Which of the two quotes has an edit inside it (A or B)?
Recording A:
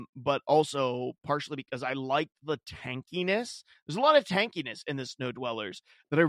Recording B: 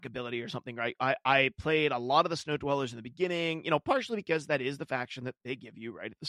B